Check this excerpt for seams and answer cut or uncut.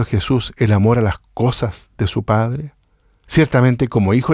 uncut